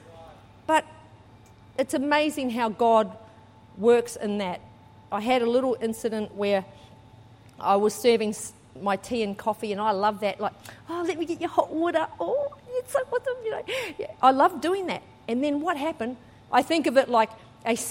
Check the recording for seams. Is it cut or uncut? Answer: cut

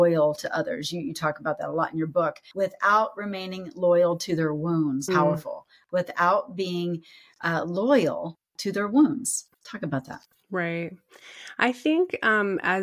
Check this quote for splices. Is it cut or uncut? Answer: cut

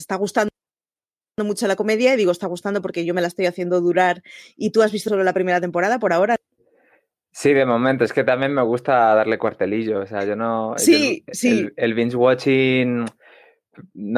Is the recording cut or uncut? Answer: uncut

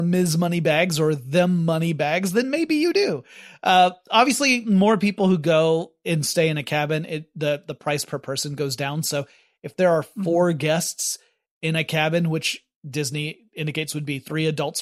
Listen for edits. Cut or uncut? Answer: uncut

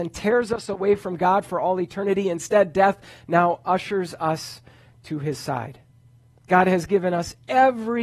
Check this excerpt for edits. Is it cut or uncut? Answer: uncut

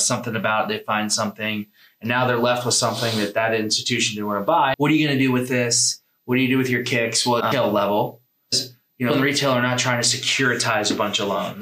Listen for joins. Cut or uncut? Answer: cut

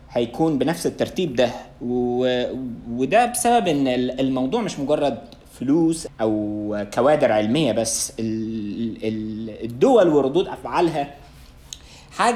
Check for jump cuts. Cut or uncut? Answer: cut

